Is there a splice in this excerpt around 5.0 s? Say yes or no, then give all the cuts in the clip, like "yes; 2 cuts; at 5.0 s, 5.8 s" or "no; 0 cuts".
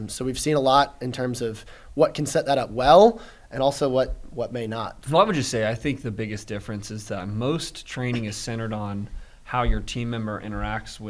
yes; 1 cut; at 5.0 s